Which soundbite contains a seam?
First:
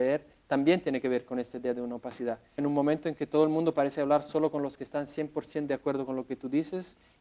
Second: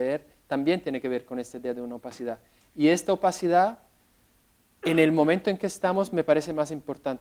first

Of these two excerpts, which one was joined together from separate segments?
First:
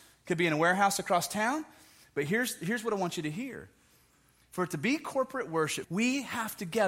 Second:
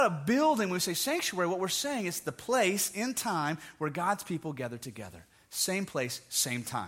first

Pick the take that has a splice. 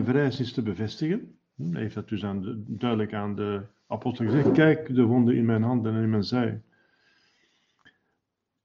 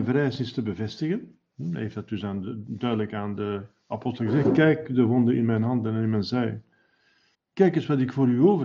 second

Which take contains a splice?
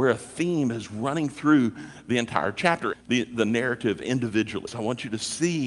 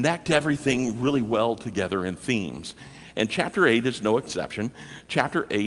first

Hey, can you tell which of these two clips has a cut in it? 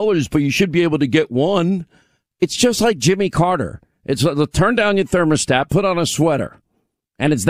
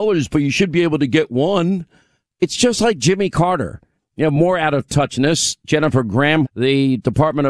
second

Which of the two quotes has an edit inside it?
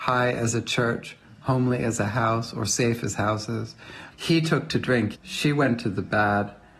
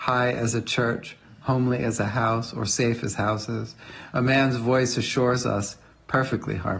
first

